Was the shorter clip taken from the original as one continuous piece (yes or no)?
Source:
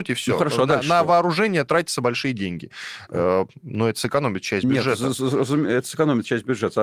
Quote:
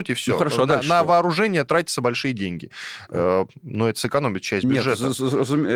yes